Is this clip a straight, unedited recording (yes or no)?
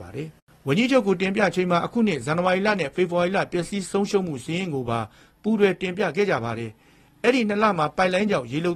yes